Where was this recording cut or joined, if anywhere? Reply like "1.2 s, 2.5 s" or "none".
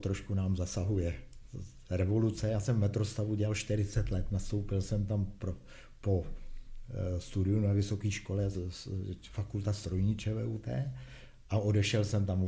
8.5 s